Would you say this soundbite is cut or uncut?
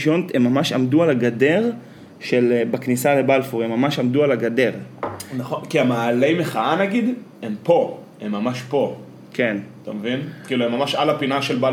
uncut